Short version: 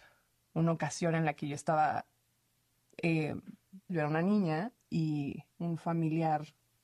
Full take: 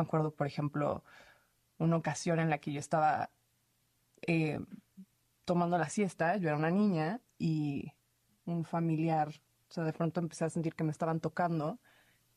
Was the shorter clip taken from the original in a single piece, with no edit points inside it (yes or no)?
no